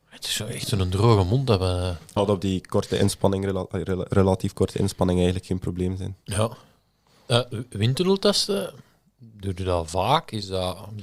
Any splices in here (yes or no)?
yes